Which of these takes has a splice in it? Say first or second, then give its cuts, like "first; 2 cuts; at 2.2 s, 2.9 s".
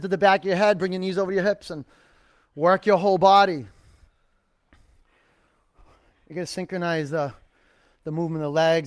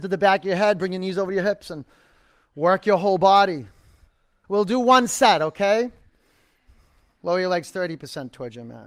second; 1 cut; at 4.4 s